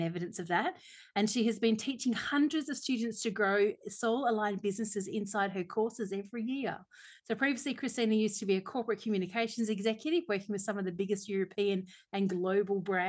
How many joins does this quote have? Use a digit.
0